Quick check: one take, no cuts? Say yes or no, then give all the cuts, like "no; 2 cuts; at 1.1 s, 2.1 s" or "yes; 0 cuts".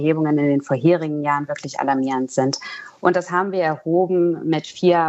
no; 1 cut; at 3.0 s